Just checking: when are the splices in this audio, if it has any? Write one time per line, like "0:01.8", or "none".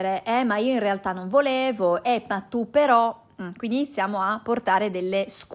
0:02.0